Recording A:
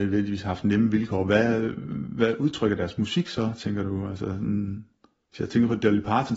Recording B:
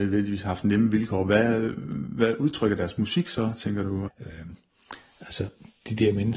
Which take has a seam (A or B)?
B